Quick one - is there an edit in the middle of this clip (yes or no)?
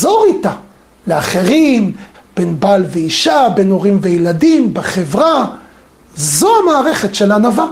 yes